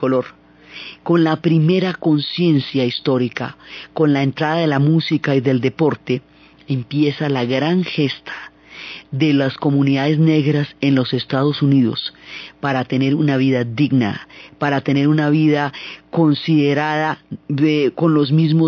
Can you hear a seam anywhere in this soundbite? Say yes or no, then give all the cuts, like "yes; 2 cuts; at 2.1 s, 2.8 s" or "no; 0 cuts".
no; 0 cuts